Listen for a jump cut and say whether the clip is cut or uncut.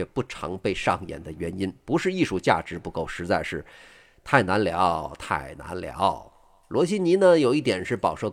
uncut